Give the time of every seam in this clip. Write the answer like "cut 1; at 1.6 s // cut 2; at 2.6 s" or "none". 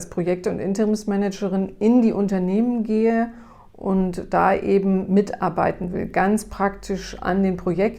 none